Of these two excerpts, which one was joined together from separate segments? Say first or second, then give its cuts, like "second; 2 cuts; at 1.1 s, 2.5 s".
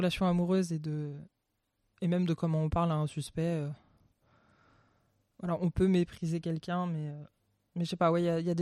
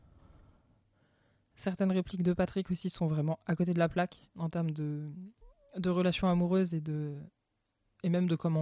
second; 1 cut; at 4.3 s